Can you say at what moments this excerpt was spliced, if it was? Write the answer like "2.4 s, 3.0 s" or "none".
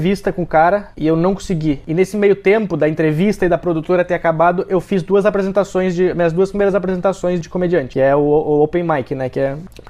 7.4 s